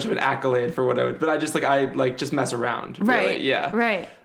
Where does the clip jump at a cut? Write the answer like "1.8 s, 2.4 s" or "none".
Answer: none